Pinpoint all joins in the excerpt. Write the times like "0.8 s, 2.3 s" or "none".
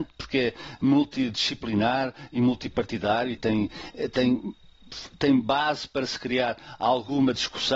3.4 s